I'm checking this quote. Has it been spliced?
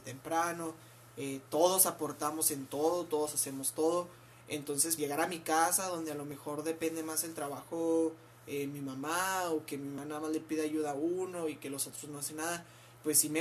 yes; 1 cut; at 5.0 s

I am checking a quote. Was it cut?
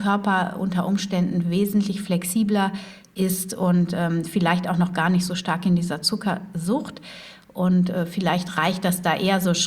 no; 0 cuts

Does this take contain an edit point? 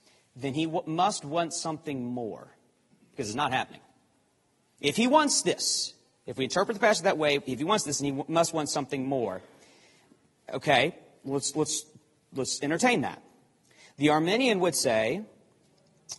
no; 0 cuts

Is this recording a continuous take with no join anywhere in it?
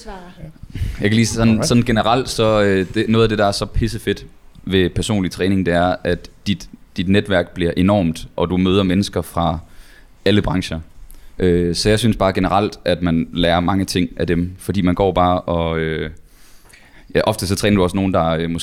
no; 1 cut; at 11.4 s

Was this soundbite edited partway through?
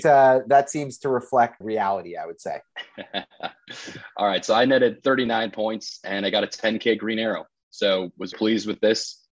yes; 2 cuts; at 1.6 s, 8.3 s

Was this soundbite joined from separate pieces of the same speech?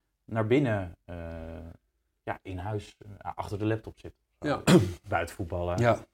yes; 1 cut; at 4.6 s

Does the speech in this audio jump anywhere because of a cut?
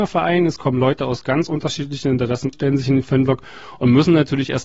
yes; 1 cut; at 2.5 s

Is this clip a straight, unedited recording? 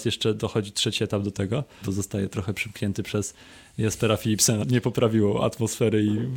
no; 2 cuts; at 1.8 s, 4.6 s

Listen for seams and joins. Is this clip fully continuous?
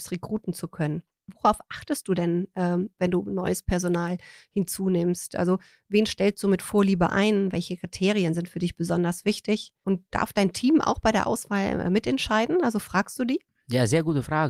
yes; 0 cuts

